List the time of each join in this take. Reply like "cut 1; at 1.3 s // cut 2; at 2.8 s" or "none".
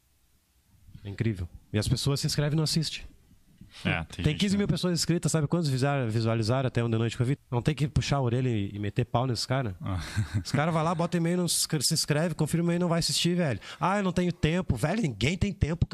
cut 1; at 7.4 s